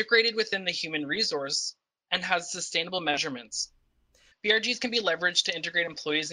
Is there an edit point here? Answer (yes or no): yes